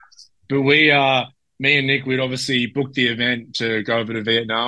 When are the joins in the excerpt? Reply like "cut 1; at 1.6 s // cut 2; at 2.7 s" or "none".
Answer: none